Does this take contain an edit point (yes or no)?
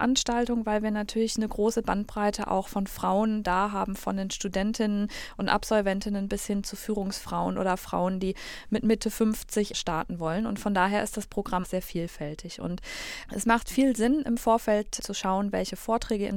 yes